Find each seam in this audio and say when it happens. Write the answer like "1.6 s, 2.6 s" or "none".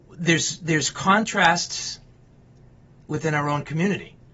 none